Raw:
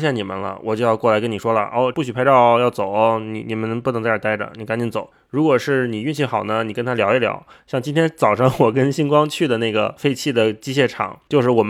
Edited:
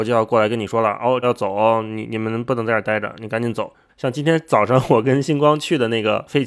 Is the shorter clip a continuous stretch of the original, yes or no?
no